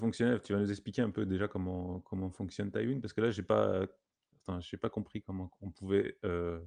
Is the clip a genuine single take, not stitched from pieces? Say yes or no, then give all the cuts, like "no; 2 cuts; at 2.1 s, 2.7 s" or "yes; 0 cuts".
yes; 0 cuts